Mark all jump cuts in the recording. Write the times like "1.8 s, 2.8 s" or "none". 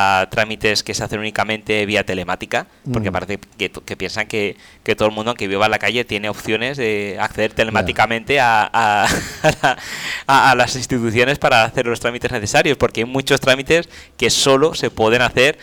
none